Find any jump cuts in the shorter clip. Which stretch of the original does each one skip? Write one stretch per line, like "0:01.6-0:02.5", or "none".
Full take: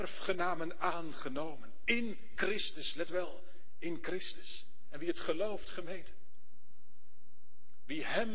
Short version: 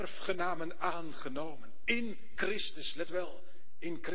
none